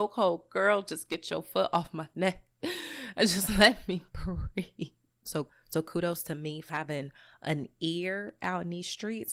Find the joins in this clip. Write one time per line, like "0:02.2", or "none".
0:05.3
0:06.7